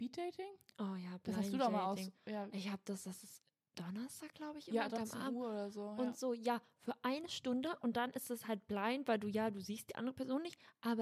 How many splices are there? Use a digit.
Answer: 1